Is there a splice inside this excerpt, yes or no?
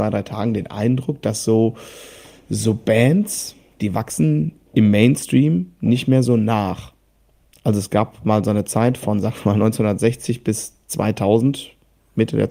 no